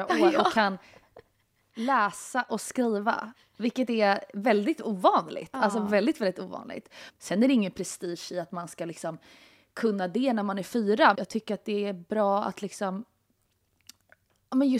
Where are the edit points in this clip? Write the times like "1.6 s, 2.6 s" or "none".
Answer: 7.1 s, 11.1 s